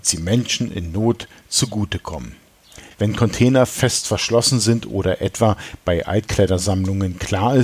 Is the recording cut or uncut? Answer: cut